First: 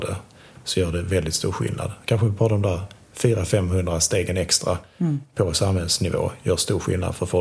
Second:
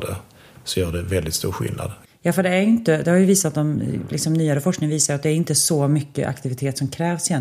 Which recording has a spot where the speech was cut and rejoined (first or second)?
second